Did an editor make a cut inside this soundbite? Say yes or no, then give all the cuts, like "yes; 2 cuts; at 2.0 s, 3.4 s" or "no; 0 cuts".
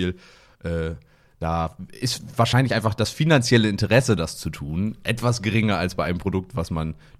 no; 0 cuts